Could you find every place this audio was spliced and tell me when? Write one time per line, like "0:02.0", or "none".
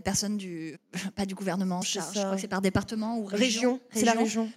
0:01.8

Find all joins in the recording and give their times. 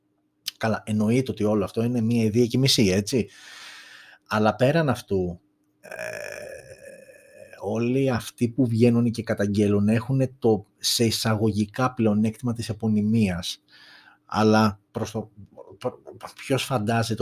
0:14.9

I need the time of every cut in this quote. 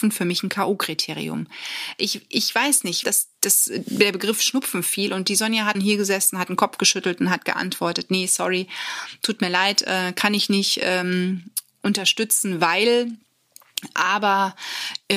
0:03.0
0:05.7

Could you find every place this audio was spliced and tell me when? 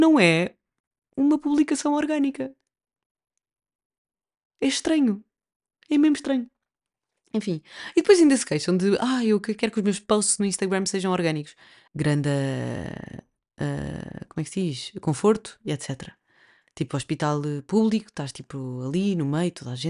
0:11.9

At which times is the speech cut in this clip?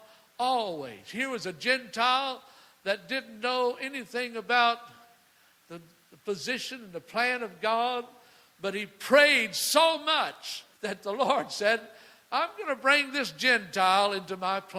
0:10.7

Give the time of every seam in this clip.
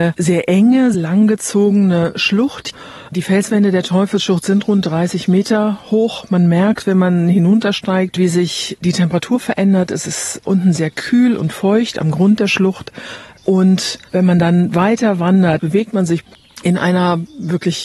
0:00.9
0:15.6

